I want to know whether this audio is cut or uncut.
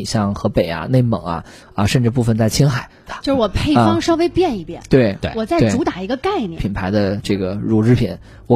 cut